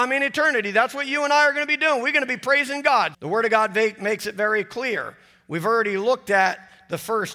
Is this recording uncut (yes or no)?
no